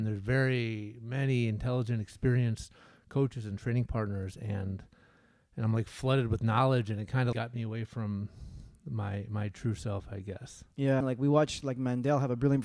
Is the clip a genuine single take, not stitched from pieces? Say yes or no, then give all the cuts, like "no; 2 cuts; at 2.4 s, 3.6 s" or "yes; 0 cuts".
no; 2 cuts; at 7.3 s, 11.0 s